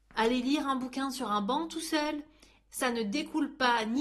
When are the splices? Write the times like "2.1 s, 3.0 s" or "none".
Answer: 2.7 s